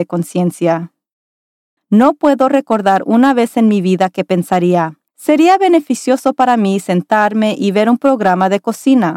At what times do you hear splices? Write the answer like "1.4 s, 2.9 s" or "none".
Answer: 1.8 s, 5.1 s

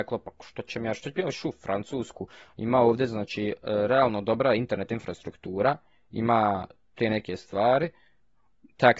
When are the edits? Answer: none

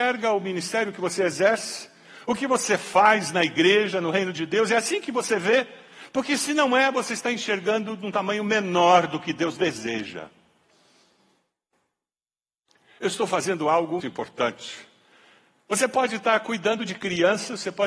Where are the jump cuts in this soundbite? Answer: 14.0 s

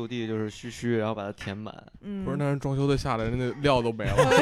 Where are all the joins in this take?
none

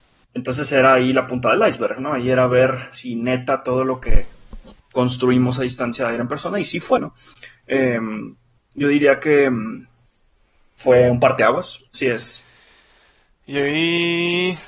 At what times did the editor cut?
7.0 s, 11.9 s

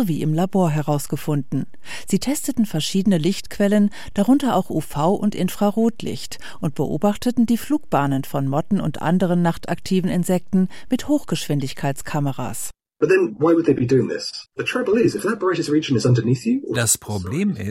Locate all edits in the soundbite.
14.5 s

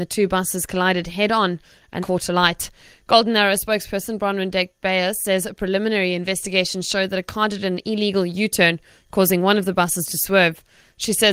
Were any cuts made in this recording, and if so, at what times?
2.0 s

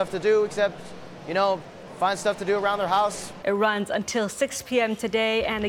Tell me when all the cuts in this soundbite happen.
3.4 s

